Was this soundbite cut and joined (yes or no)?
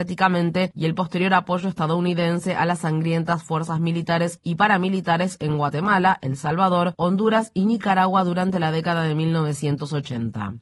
no